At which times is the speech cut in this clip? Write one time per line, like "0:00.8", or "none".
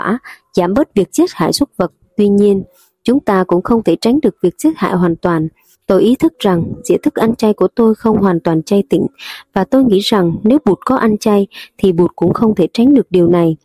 0:05.7